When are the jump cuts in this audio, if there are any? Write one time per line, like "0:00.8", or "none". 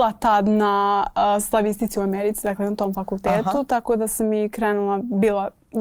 none